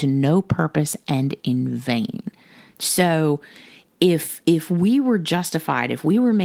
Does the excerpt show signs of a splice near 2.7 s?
yes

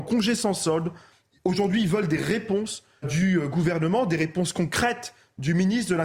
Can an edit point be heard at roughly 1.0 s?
no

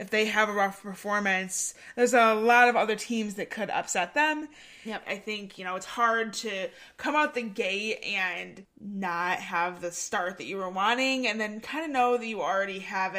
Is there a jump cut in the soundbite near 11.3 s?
no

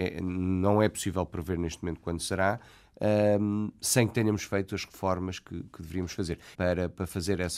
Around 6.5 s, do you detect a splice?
yes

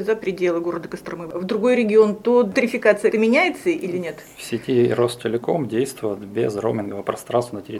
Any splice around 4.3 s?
no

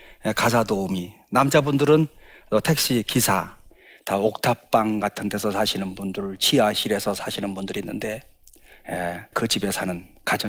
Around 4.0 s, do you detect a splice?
no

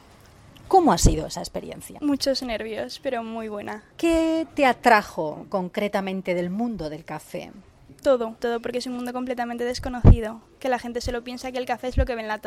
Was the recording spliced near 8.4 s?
yes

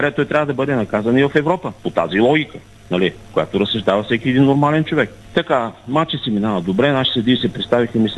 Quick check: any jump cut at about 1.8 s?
yes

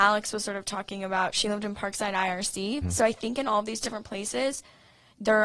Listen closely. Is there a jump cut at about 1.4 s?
no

